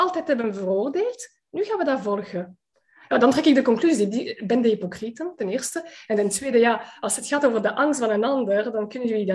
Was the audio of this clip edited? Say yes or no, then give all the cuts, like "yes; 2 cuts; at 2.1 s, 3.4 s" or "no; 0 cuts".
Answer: no; 0 cuts